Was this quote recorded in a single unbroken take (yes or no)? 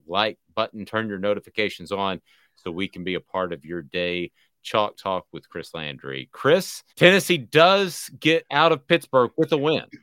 no